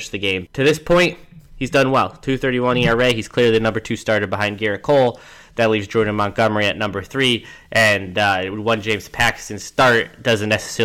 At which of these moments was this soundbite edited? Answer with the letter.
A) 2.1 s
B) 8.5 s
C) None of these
C